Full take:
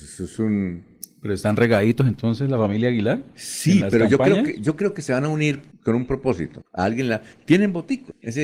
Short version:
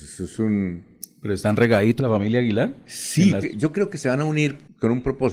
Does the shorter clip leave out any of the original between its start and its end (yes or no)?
yes